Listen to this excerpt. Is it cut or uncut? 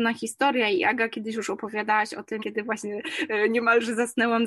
cut